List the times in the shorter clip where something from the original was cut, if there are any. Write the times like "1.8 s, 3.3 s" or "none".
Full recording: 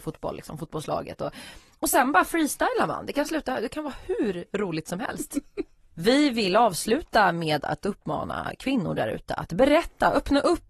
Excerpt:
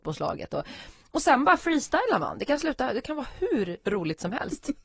none